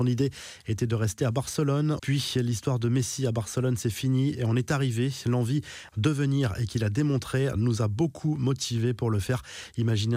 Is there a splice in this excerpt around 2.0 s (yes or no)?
yes